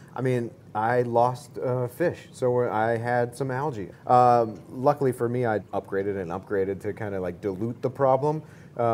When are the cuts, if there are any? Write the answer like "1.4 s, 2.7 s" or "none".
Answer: 3.9 s, 5.6 s